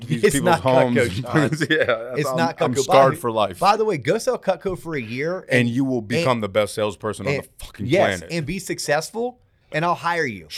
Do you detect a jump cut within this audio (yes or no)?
no